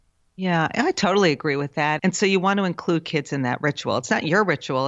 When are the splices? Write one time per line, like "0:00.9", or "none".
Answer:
0:02.0